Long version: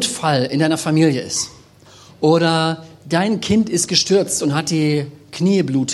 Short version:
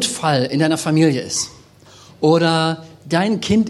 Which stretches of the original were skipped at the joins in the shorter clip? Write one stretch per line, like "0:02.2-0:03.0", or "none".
none